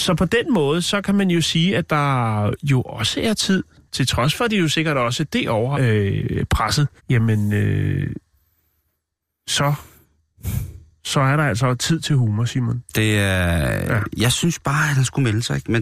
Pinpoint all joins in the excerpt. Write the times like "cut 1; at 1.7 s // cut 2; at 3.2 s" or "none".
cut 1; at 5.7 s // cut 2; at 7.0 s // cut 3; at 12.9 s